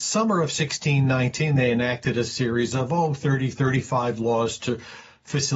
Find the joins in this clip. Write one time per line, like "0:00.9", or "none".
none